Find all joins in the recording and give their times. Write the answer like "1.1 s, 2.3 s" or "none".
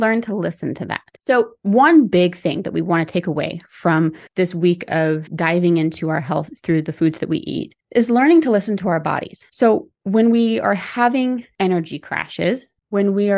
1.2 s